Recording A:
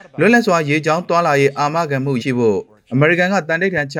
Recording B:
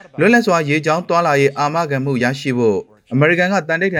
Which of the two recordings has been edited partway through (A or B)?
A